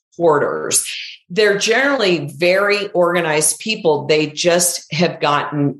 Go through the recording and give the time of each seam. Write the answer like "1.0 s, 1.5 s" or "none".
none